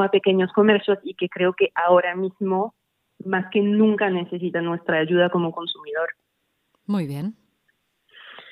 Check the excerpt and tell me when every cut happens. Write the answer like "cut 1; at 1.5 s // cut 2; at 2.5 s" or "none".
none